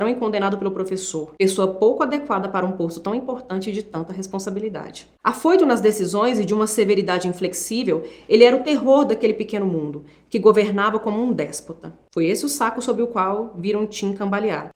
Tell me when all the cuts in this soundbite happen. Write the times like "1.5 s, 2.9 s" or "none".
12.1 s